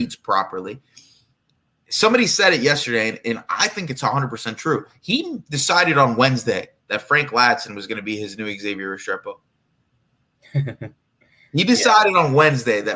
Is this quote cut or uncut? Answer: uncut